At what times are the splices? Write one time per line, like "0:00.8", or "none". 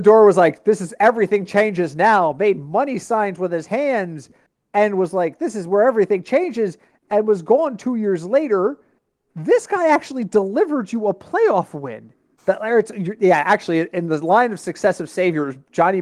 0:12.4

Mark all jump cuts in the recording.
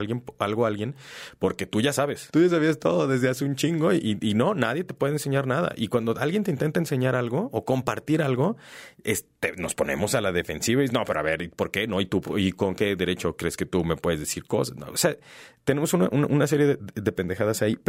none

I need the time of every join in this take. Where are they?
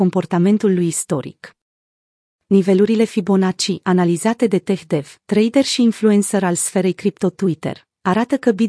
none

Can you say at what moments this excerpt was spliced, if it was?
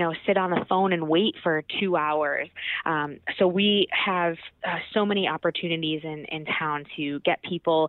none

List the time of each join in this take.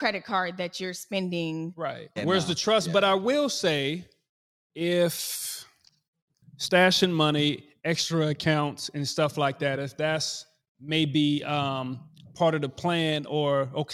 0:02.2

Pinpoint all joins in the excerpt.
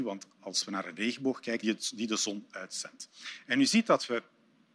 0:01.6

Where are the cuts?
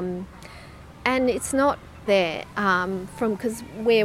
0:02.1

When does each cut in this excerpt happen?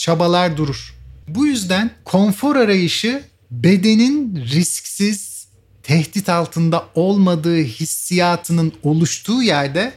0:01.2

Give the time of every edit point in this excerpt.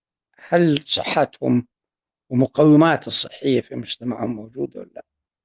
none

